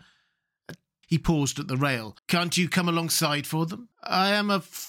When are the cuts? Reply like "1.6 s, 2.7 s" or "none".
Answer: 1.0 s, 2.2 s, 3.9 s